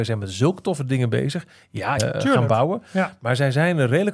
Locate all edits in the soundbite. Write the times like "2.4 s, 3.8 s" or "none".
2.0 s